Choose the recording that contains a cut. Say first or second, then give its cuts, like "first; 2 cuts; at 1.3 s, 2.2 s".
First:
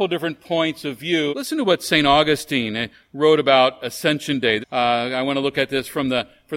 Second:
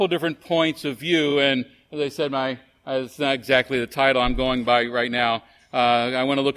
first; 2 cuts; at 1.3 s, 4.6 s